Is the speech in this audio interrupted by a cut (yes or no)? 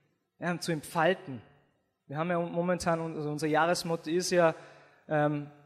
no